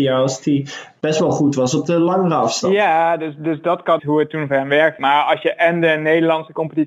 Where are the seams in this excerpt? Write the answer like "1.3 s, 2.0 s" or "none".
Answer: 4.0 s, 5.0 s

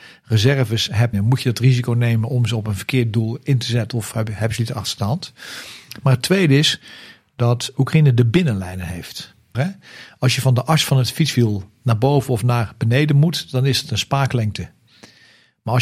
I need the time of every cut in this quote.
1.1 s, 9.5 s

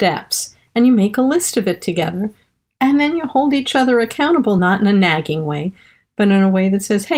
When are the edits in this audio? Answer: none

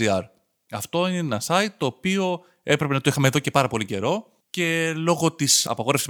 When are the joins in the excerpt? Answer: 4.4 s

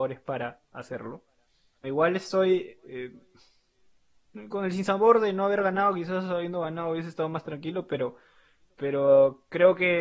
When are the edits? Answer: 1.8 s

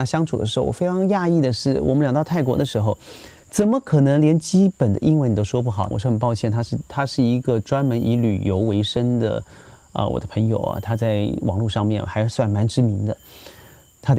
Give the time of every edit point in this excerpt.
5.9 s

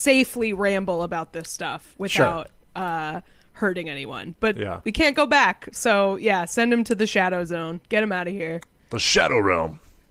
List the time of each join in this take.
none

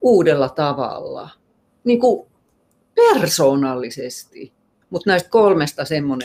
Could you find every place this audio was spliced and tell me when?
4.8 s

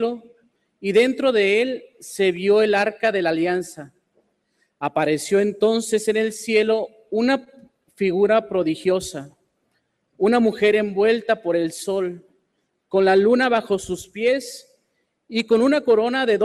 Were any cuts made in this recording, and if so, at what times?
none

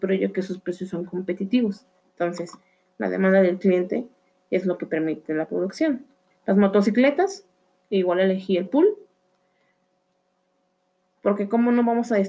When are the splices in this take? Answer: 2.0 s, 6.3 s

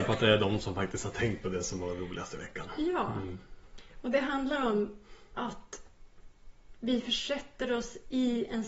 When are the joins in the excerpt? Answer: none

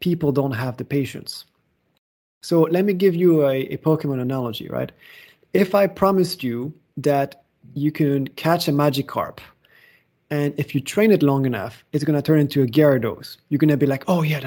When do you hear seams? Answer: none

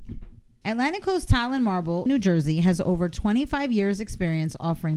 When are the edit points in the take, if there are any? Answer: 2.1 s

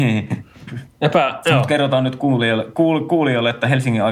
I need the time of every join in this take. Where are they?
none

